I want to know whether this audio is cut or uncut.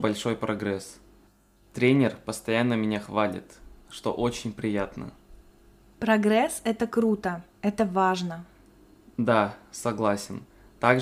uncut